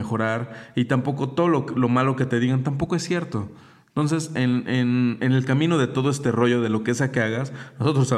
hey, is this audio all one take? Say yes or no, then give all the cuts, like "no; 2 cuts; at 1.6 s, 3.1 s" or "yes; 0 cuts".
yes; 0 cuts